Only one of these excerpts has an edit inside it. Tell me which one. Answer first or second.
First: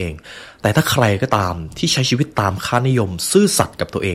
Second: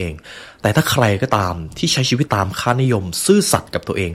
second